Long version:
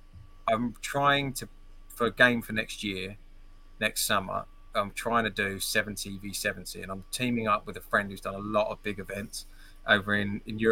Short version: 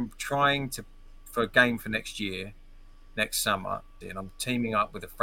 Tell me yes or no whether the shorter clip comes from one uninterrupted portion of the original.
no